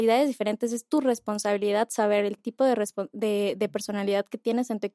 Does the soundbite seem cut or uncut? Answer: uncut